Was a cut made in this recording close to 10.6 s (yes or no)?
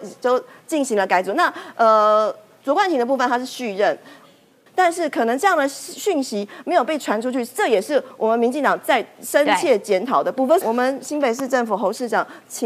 yes